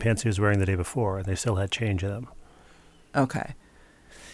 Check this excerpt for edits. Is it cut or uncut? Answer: uncut